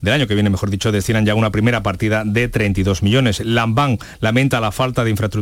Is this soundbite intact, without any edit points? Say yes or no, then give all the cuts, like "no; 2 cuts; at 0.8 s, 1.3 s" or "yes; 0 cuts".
yes; 0 cuts